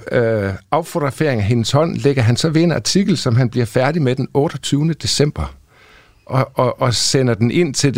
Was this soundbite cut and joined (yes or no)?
no